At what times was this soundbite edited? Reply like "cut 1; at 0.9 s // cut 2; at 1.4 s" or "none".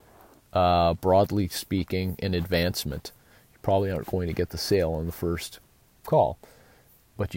none